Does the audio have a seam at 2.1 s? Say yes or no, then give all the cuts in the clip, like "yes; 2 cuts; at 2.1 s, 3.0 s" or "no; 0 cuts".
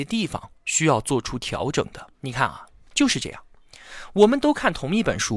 yes; 1 cut; at 2.1 s